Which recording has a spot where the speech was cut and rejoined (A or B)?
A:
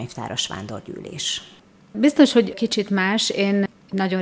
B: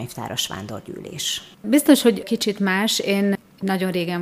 B